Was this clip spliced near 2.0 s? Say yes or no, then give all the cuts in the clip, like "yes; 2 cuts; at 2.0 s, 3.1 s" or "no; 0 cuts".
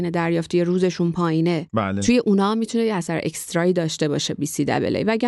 no; 0 cuts